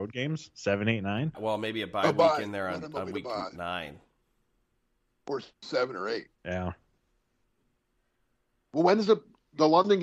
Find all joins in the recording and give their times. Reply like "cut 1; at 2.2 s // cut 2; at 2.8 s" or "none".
cut 1; at 1.3 s // cut 2; at 6.3 s

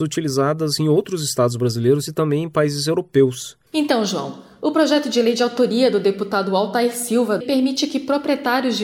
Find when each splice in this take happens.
cut 1; at 3.7 s // cut 2; at 7.4 s

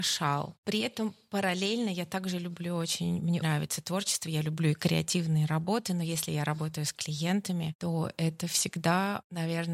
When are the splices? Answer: cut 1; at 3.4 s

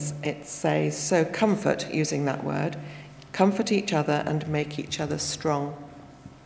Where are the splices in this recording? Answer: none

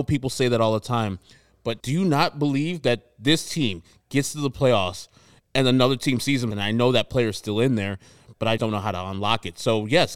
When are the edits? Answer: cut 1; at 1.8 s // cut 2; at 6.5 s // cut 3; at 8.6 s

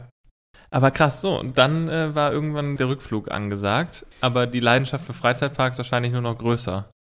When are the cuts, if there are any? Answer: cut 1; at 2.8 s // cut 2; at 4.1 s

